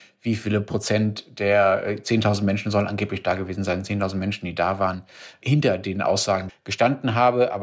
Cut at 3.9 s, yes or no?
no